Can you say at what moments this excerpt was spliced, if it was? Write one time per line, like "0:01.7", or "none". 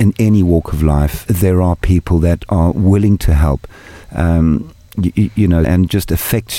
0:01.3
0:04.0
0:05.6